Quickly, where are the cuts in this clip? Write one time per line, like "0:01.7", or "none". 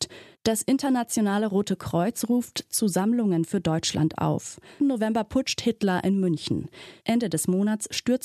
0:04.8
0:07.0